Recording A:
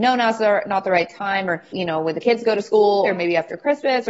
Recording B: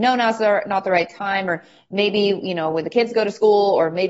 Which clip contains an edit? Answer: A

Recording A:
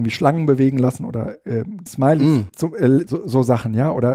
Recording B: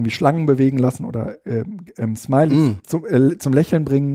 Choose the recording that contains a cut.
A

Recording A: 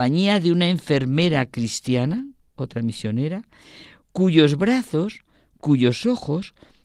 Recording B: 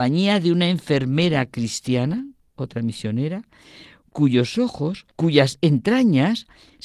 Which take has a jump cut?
B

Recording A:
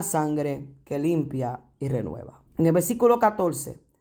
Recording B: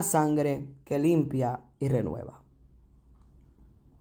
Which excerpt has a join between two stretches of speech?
A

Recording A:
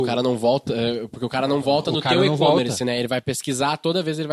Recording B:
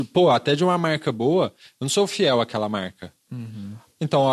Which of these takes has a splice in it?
B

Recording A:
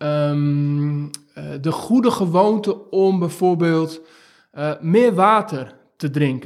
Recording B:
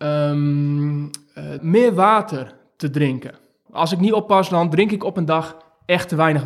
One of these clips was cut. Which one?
B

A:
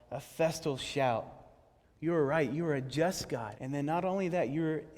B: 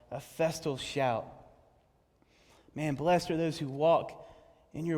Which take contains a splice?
A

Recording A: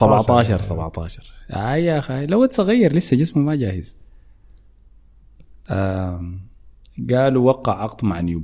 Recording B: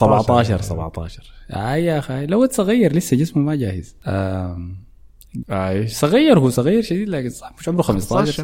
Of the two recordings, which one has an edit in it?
B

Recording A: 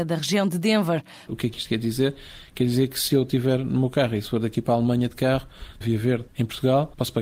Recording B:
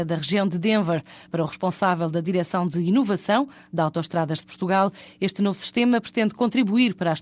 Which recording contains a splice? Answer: A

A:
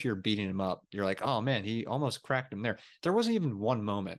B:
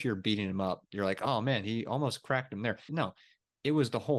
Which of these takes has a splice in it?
B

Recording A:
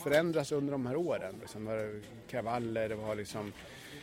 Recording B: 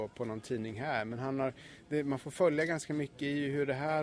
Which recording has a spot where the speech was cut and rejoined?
A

